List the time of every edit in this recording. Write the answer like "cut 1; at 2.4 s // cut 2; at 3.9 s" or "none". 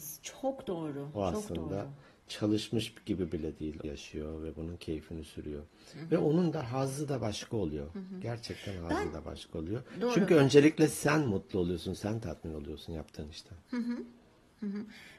cut 1; at 3.8 s